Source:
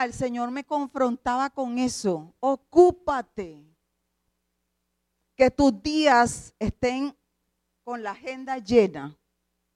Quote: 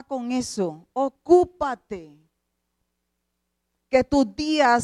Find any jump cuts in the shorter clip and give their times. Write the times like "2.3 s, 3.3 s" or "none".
none

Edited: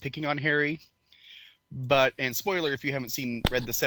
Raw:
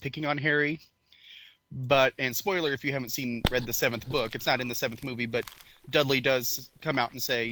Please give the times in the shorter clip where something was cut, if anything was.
none

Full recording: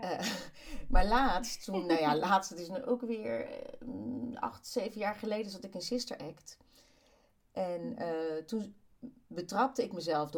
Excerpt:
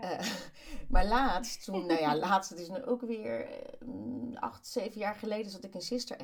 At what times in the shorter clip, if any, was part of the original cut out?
none

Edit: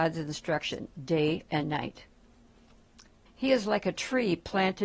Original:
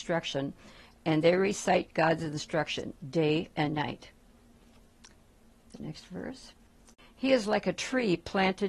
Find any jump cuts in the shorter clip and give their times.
3.3 s

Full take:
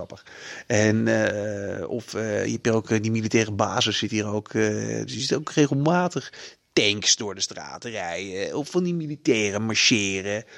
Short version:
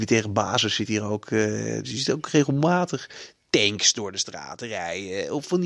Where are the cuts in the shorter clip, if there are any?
none

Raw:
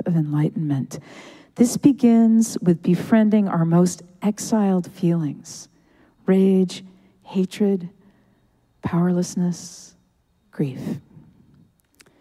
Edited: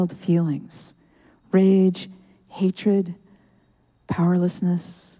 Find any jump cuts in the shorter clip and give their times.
none

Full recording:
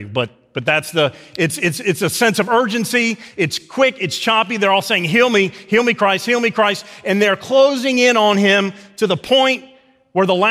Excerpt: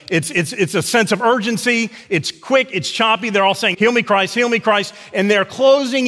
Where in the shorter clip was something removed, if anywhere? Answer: 3.7 s

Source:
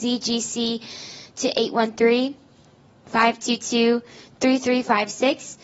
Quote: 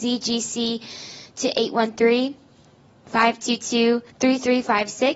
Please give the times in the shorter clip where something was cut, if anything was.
4.1 s

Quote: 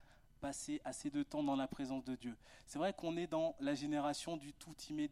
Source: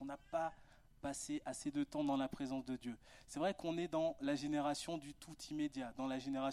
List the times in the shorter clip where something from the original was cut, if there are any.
none

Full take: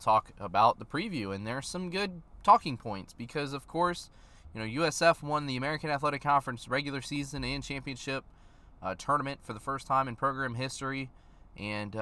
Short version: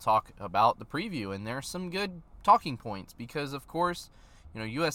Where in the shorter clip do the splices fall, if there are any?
none

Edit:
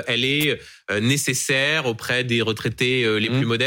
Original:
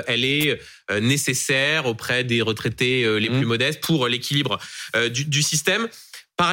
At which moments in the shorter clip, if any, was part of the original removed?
none

